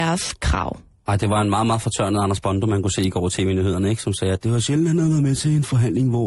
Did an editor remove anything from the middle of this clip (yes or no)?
no